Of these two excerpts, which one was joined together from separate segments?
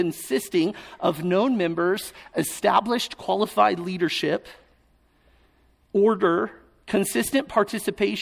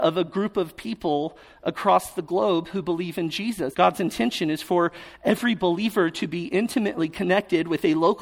second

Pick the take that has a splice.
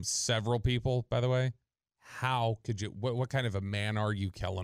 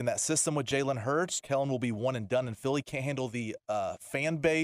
second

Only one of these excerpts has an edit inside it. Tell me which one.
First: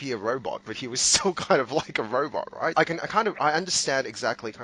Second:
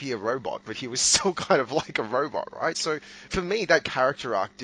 first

